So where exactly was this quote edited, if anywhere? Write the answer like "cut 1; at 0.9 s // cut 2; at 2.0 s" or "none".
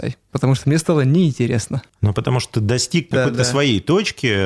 none